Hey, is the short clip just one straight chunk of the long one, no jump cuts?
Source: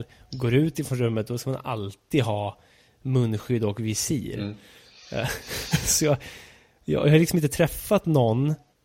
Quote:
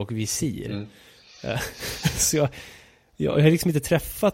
yes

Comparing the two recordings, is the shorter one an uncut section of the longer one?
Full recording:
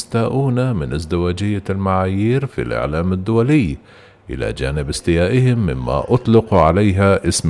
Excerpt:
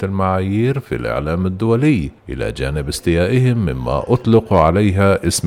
no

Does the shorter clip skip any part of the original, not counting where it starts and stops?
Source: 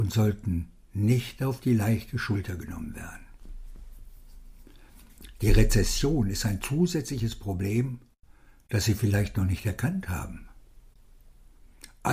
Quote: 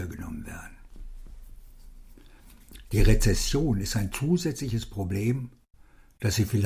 no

